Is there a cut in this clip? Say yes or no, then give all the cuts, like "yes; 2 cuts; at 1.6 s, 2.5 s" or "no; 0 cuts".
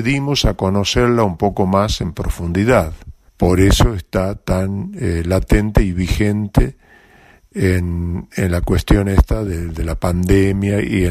yes; 1 cut; at 3.3 s